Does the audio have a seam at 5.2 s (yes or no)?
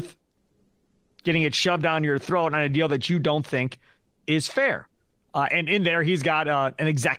yes